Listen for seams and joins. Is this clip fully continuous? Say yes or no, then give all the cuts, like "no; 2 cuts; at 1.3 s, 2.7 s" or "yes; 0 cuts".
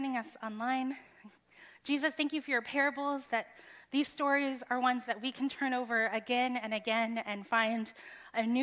yes; 0 cuts